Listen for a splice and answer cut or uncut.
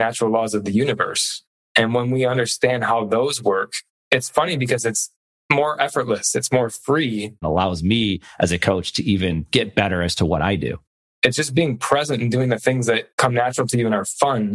cut